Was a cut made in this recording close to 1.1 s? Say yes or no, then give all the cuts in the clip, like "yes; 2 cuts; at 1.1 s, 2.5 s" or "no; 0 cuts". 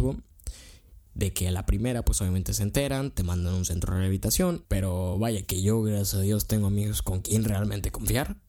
yes; 2 cuts; at 1.1 s, 4.6 s